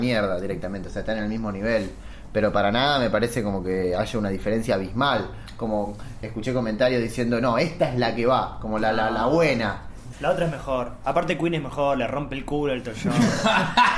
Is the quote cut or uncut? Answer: cut